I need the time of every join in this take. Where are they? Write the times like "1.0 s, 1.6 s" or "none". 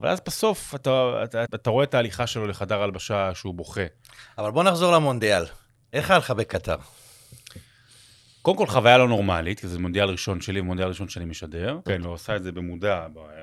1.5 s, 11.9 s